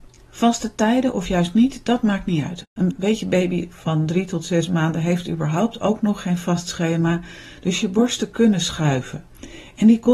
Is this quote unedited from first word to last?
no; 1 cut; at 2.6 s

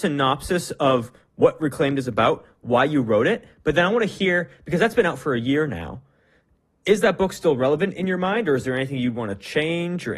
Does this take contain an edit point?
no; 0 cuts

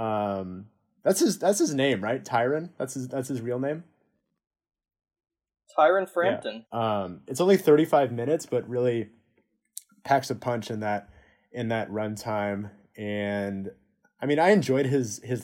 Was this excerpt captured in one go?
no; 1 cut; at 6.6 s

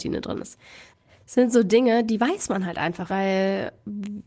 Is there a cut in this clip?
yes; 1 cut; at 3.1 s

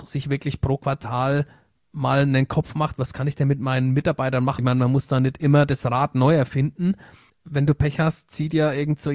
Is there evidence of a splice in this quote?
yes; 2 cuts; at 4.6 s, 7.3 s

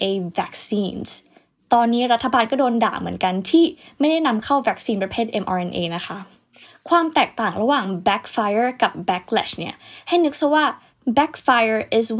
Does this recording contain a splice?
no; 0 cuts

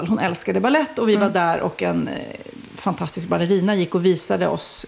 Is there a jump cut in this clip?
no; 0 cuts

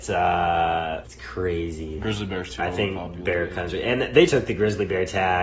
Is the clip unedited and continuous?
no; 3 cuts; at 1.0 s, 2.6 s, 4.3 s

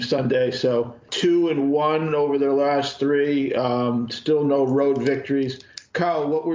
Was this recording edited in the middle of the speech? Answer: yes; 1 cut; at 1.1 s

